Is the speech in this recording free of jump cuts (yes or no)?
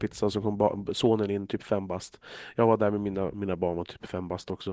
no